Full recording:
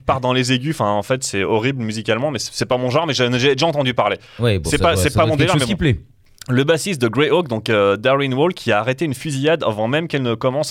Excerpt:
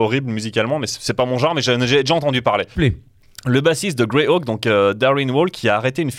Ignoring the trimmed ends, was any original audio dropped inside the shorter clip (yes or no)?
yes